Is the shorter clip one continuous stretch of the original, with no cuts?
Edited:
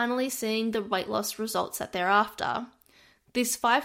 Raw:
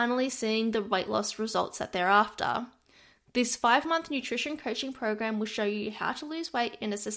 yes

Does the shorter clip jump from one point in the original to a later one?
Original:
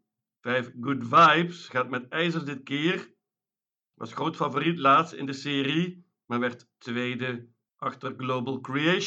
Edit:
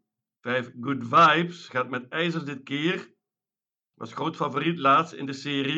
no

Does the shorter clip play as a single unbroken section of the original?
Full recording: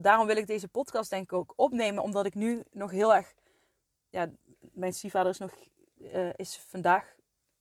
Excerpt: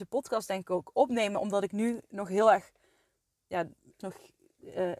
no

